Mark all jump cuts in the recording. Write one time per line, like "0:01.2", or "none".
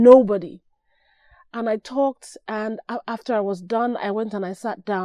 none